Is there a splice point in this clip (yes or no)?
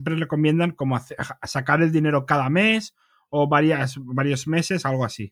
no